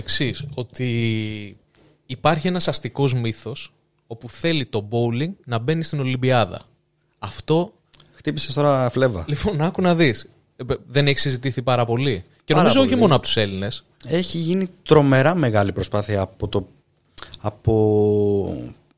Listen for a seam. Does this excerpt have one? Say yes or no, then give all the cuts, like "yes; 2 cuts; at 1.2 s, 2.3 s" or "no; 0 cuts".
no; 0 cuts